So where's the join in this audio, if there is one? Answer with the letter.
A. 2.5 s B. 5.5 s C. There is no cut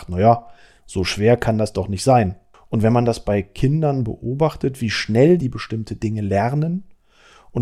A